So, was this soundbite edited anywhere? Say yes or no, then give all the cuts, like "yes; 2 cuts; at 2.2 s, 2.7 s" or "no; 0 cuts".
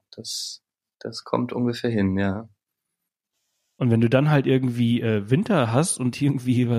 no; 0 cuts